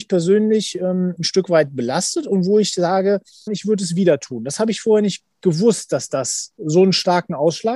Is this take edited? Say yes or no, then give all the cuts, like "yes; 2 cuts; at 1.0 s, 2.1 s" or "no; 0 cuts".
yes; 1 cut; at 3.5 s